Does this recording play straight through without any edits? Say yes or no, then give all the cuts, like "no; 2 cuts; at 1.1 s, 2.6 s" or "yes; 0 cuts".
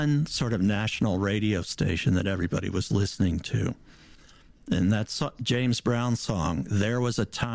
yes; 0 cuts